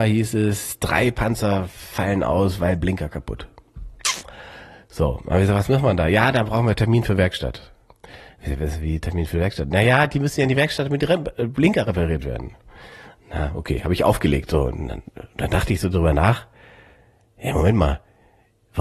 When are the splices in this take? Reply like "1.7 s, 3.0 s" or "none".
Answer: none